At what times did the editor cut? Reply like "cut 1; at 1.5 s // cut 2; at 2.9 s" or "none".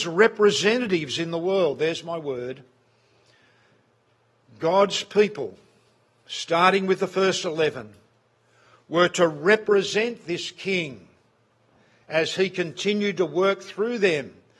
none